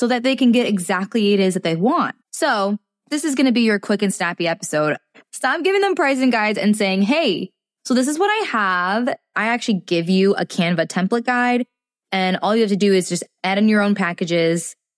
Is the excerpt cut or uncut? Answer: cut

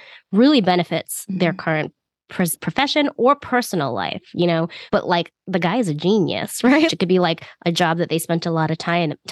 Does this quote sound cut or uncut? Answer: cut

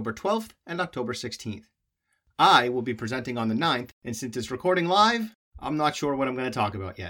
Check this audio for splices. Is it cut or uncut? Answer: cut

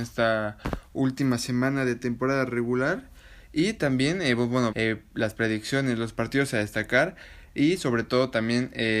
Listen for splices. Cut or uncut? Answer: cut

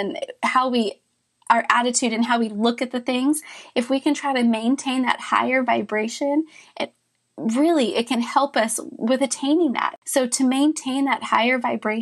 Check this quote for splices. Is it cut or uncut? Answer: uncut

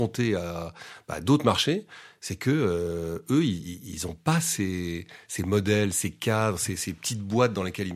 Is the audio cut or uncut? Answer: uncut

